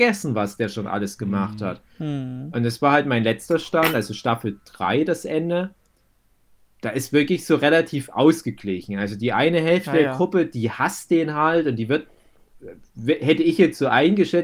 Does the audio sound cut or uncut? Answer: uncut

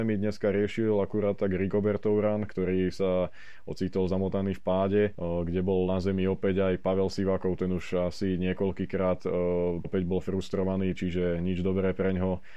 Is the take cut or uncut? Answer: cut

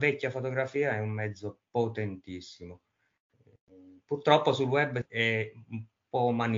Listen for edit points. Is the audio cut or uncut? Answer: uncut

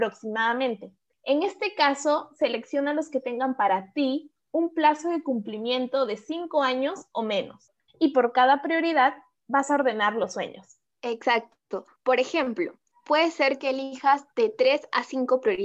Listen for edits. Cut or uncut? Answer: cut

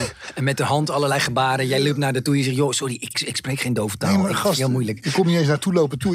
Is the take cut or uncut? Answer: cut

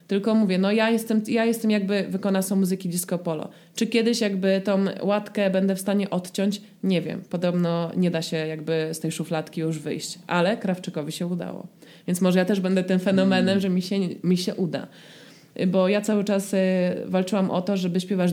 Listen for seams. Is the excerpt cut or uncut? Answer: uncut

